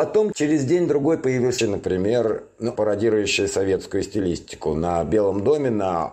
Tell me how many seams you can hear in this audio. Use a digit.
2